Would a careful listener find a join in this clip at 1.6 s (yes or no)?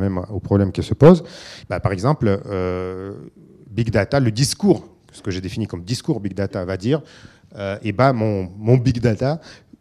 yes